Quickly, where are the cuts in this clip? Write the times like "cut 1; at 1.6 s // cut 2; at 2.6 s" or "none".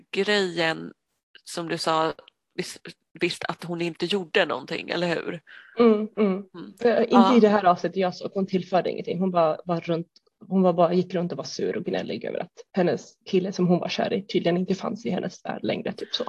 cut 1; at 12.7 s